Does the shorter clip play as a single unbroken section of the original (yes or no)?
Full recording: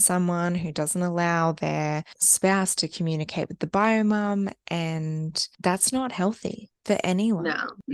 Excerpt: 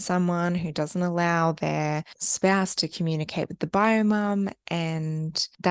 yes